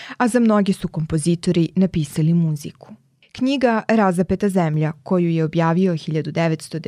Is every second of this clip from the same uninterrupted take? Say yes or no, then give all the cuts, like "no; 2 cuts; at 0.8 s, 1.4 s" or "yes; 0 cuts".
yes; 0 cuts